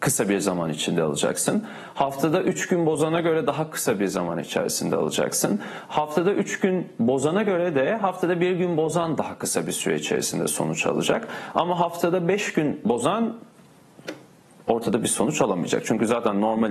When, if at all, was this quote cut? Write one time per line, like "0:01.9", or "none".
none